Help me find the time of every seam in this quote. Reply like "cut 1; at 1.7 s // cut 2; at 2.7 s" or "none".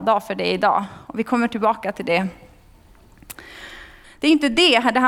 cut 1; at 4.0 s